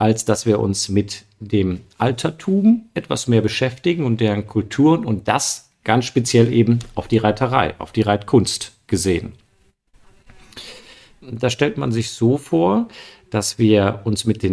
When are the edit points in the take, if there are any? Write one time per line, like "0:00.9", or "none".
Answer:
0:11.2